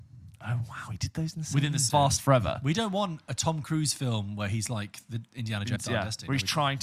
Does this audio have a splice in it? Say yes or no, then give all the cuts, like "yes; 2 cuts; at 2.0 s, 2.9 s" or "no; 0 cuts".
yes; 2 cuts; at 1.9 s, 5.8 s